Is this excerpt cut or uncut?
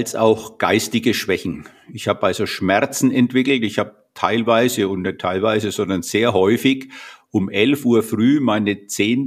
uncut